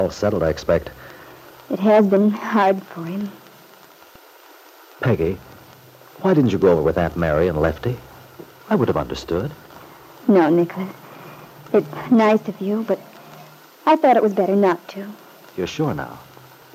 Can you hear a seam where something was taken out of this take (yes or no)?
no